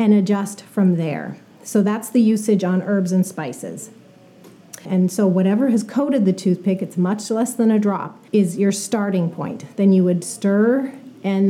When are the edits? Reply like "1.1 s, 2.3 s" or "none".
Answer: 4.9 s, 8.3 s